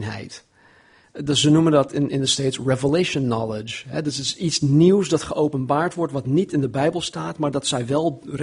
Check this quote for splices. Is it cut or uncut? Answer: cut